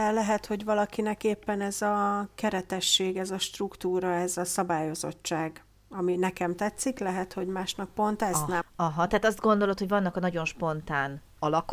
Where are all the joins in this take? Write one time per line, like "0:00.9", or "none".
0:08.6